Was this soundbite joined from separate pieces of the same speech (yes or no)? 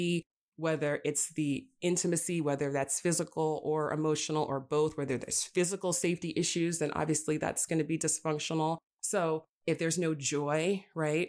no